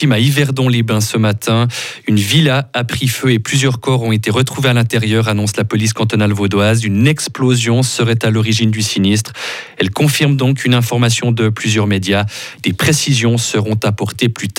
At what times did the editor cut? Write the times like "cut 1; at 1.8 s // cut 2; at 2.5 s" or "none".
none